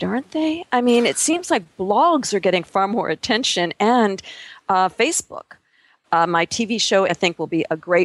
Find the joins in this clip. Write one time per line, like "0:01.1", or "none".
0:06.0
0:07.1